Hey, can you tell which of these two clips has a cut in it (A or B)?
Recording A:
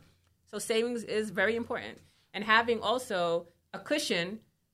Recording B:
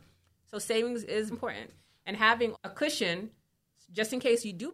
B